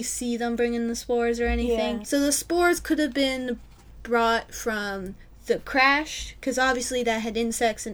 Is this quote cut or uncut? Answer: cut